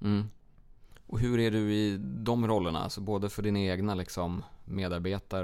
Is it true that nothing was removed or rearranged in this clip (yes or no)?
yes